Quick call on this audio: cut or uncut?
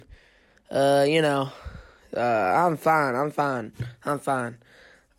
uncut